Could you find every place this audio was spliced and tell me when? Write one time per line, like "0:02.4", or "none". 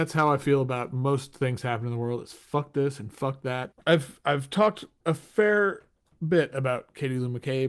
0:03.7